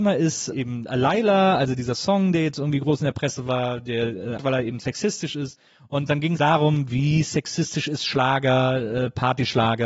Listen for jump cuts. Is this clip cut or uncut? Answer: cut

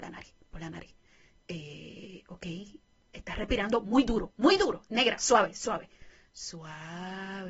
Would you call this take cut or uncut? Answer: uncut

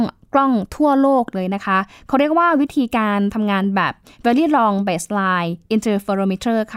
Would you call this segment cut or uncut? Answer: uncut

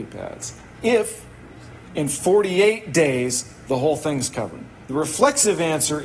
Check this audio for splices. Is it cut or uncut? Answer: uncut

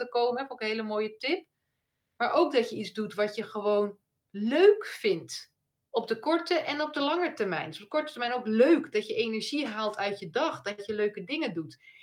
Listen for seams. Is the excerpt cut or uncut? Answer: uncut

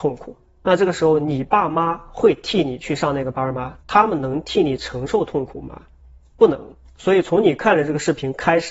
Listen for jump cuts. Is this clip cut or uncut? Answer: cut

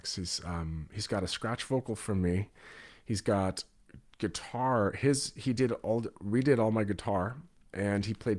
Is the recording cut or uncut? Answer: uncut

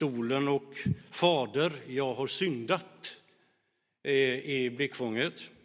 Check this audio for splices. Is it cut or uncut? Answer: uncut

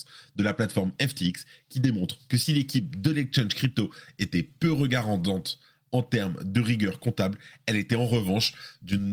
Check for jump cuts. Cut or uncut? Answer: uncut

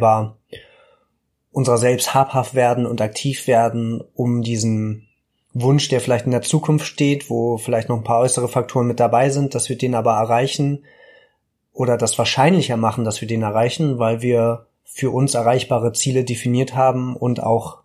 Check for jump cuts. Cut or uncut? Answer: uncut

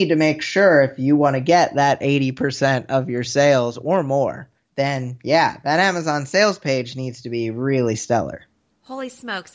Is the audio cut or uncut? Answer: cut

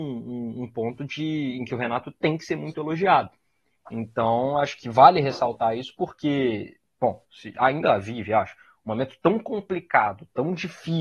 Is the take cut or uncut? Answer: cut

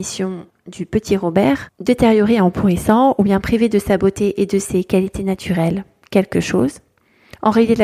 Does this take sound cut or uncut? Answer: uncut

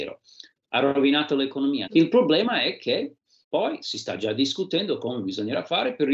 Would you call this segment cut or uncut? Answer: cut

